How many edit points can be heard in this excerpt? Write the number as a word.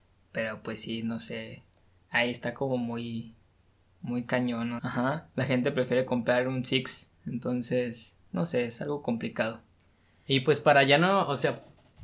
one